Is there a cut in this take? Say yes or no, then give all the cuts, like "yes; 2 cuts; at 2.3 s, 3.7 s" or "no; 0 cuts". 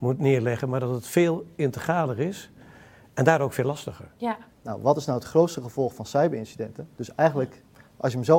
yes; 2 cuts; at 4.5 s, 7.0 s